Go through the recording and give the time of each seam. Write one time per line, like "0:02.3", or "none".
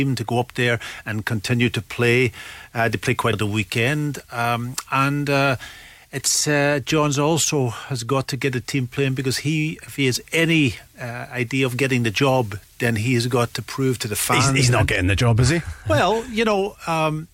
0:03.3